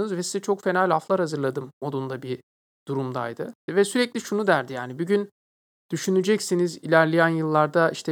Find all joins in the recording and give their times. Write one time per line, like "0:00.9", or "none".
0:03.7